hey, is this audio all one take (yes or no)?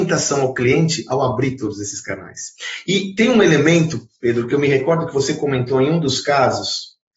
yes